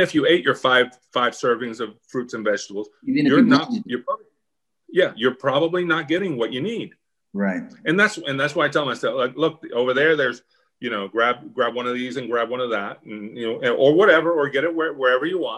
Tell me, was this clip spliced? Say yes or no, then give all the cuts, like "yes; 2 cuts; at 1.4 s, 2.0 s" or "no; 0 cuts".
yes; 1 cut; at 7.2 s